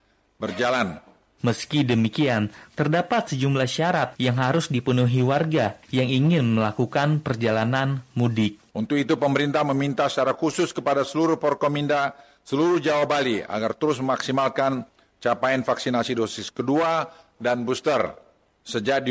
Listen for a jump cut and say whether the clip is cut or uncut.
cut